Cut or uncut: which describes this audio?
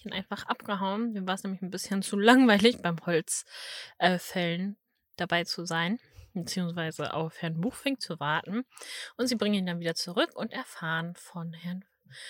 uncut